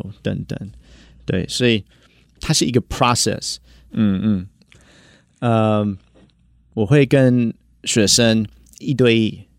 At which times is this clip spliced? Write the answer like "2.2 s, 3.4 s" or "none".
3.9 s

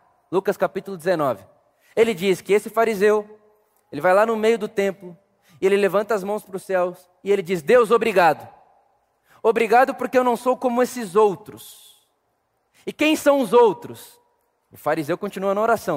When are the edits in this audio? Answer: none

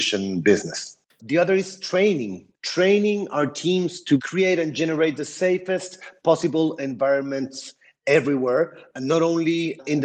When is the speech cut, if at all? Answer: 1.2 s, 2.6 s

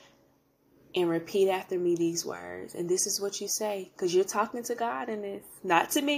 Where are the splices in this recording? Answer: none

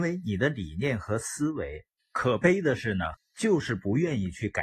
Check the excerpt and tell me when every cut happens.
2.0 s, 3.1 s

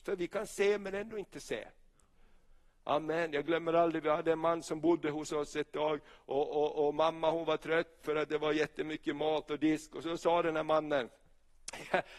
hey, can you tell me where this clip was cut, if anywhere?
none

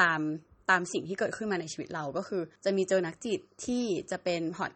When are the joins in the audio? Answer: 2.6 s

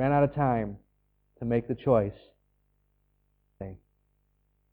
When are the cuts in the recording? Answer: 3.6 s

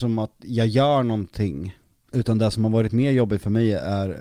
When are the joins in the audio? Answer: 2.1 s

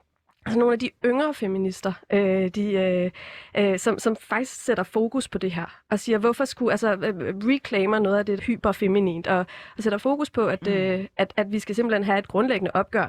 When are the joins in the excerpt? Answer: 8.4 s

